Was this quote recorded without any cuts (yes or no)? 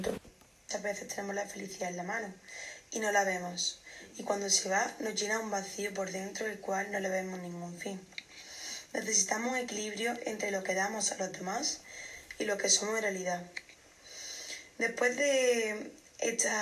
yes